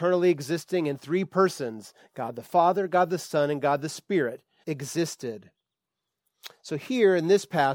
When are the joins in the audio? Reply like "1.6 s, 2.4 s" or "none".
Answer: 4.6 s